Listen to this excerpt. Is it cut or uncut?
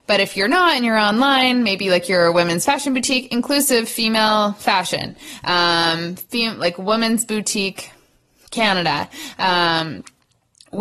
uncut